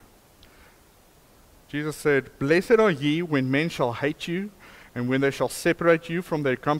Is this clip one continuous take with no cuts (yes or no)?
yes